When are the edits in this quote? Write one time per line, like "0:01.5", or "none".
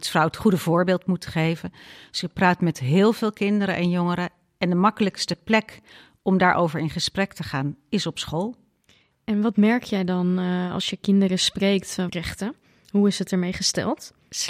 0:12.1